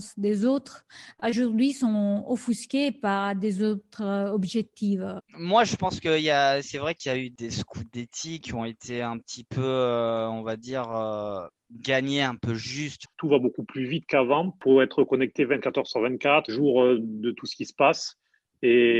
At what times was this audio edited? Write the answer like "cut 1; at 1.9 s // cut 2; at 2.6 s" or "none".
cut 1; at 5.3 s // cut 2; at 13.0 s // cut 3; at 16.5 s